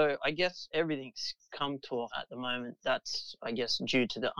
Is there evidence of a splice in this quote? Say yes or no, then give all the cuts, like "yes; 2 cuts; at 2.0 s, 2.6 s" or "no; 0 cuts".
yes; 1 cut; at 2.1 s